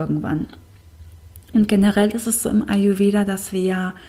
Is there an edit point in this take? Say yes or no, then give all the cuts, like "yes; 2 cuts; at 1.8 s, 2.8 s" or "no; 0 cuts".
no; 0 cuts